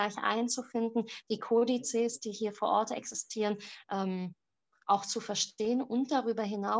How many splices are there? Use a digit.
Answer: 0